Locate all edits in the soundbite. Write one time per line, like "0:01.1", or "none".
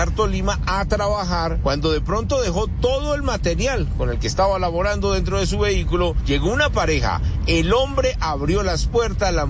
none